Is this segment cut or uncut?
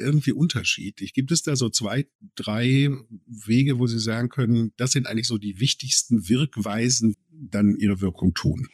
cut